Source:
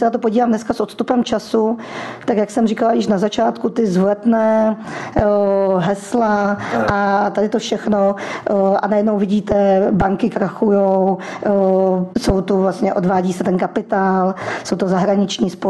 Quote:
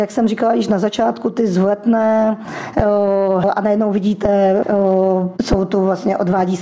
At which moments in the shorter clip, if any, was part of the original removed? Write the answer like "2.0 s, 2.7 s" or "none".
3.4 s, 4.6 s